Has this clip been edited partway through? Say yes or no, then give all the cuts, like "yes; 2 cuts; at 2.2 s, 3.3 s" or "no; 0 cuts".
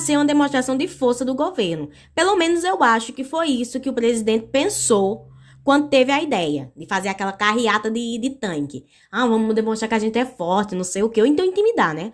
no; 0 cuts